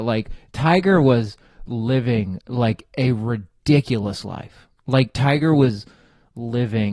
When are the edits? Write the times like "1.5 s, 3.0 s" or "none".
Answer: none

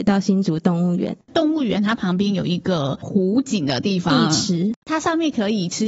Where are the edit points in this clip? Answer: 1.2 s

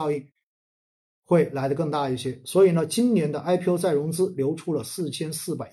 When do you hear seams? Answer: none

